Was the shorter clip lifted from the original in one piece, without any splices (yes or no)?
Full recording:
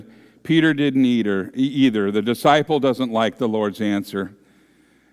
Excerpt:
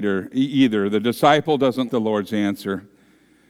no